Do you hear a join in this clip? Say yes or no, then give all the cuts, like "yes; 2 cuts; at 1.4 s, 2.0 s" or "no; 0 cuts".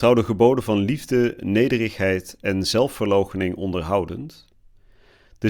no; 0 cuts